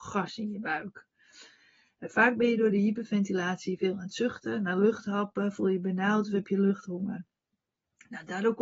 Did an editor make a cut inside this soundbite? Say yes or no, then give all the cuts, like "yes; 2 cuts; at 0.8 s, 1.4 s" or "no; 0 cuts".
no; 0 cuts